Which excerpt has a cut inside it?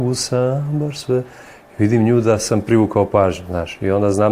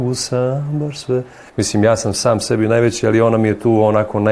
second; 1 cut; at 1.5 s

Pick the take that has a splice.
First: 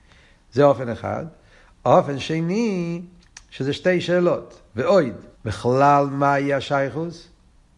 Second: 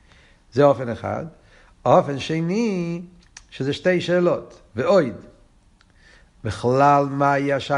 first; 1 cut; at 5.3 s

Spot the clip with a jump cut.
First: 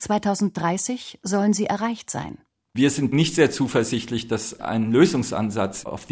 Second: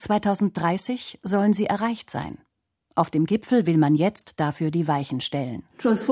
first; 1 cut; at 2.6 s

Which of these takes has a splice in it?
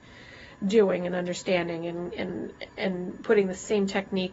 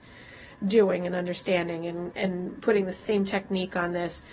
second; 1 cut; at 2.1 s

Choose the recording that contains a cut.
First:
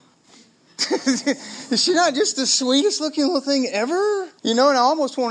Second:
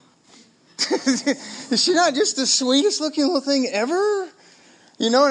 first; 1 cut; at 4.4 s

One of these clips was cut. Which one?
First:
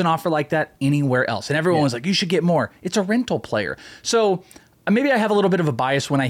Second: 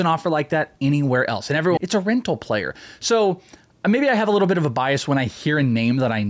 second; 1 cut; at 1.8 s

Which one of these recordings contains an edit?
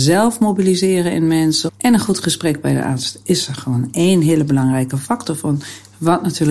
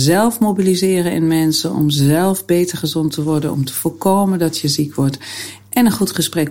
first; 1 cut; at 1.7 s

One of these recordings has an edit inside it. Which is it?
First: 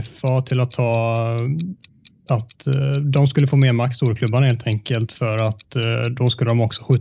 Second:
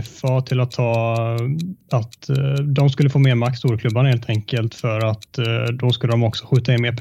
second; 1 cut; at 1.8 s

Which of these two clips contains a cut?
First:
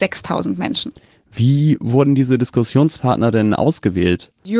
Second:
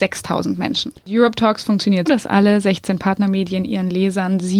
second; 2 cuts; at 1.0 s, 2.1 s

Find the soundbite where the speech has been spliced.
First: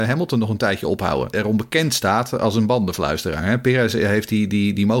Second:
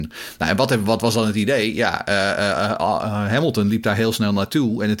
first; 1 cut; at 1.3 s

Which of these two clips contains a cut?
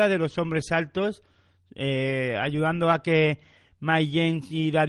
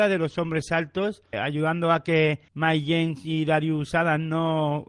second; 2 cuts; at 1.3 s, 2.5 s

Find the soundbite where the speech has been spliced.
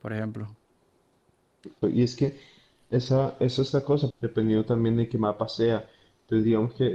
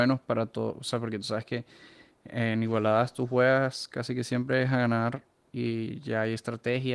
first; 2 cuts; at 1.8 s, 4.1 s

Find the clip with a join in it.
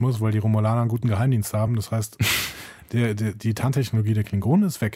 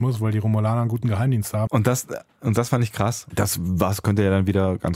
second; 2 cuts; at 1.7 s, 3.3 s

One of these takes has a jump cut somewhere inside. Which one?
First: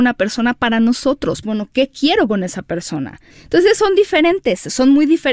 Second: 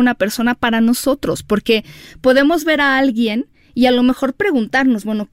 first; 2 cuts; at 1.4 s, 3.3 s

